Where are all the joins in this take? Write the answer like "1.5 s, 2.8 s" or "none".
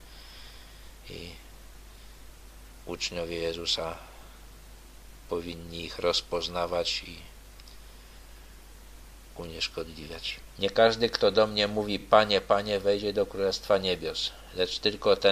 none